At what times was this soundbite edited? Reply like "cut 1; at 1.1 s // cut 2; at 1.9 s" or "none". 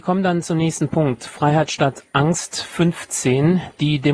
none